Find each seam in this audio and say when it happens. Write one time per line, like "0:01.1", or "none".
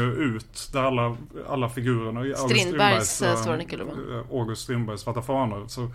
none